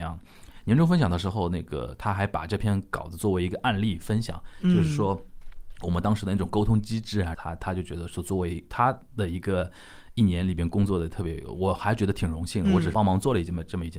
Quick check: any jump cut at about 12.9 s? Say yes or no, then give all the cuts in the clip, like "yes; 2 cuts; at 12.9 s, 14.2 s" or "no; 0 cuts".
yes; 2 cuts; at 7.3 s, 12.9 s